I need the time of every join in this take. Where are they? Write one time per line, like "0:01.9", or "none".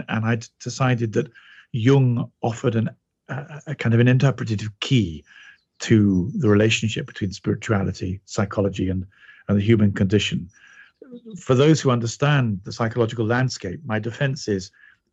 none